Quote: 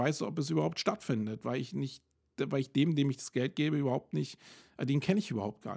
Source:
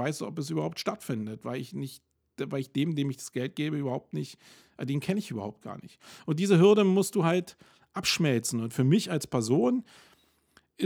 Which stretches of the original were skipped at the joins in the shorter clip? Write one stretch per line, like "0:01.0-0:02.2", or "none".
none